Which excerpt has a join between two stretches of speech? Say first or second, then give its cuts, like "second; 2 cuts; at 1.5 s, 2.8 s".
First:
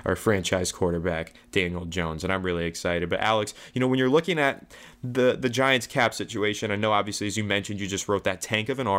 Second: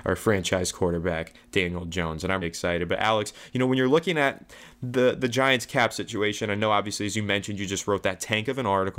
second; 1 cut; at 2.4 s